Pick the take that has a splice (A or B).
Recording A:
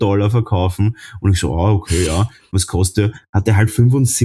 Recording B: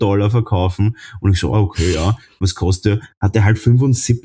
B